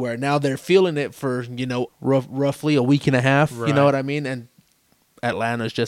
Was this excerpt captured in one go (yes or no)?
no